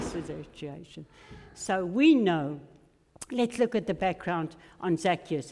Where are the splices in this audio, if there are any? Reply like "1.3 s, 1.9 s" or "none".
none